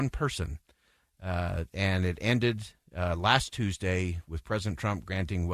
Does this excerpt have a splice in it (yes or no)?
no